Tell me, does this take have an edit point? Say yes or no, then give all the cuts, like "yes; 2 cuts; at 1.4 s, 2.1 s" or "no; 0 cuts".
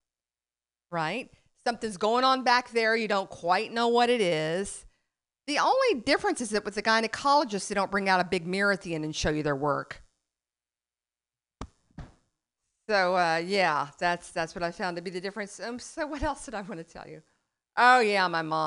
no; 0 cuts